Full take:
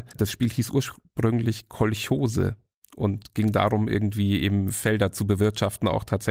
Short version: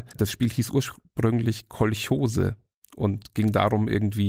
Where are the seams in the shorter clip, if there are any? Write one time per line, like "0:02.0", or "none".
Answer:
none